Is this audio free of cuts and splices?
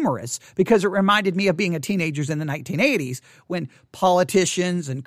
yes; 0 cuts

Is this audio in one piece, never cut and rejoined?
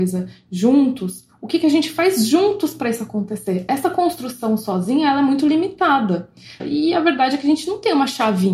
no; 1 cut; at 6.6 s

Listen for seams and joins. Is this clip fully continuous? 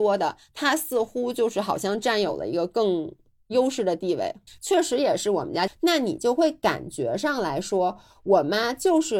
no; 2 cuts; at 4.5 s, 5.7 s

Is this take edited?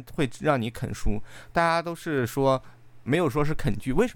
yes; 1 cut; at 3.1 s

